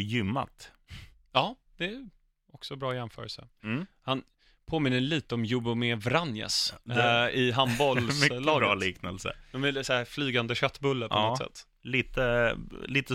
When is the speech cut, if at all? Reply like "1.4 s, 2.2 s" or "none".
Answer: 3.6 s

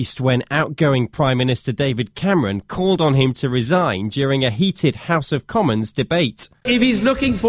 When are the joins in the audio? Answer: none

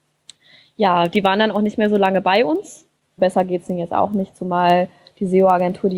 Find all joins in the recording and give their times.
3.2 s

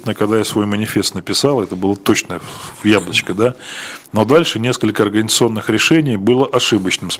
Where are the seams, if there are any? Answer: none

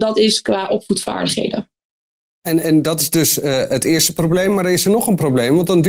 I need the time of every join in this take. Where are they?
none

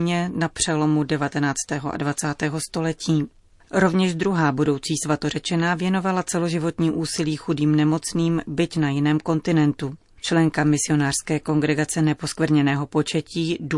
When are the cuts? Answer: none

